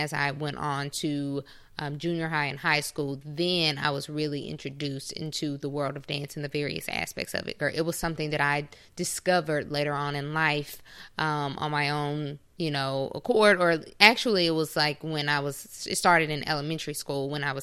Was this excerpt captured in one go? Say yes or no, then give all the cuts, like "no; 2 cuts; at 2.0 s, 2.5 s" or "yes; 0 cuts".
no; 1 cut; at 7.6 s